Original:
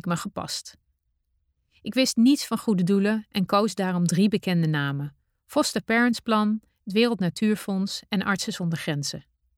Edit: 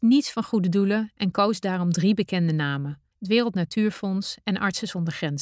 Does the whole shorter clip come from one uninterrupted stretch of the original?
no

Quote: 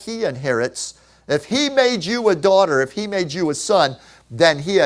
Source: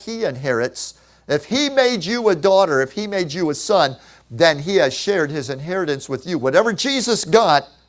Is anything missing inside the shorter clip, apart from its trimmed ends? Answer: no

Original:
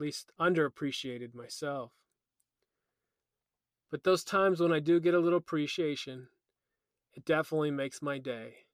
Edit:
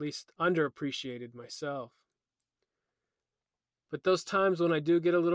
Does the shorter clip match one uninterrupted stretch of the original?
yes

